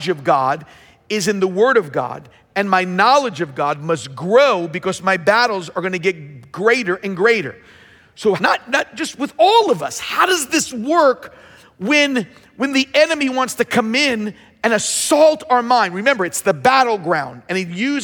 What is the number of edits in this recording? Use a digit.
1